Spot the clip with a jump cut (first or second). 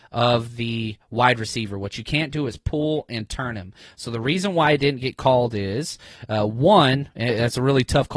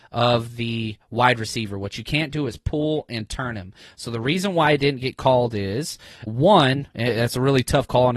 second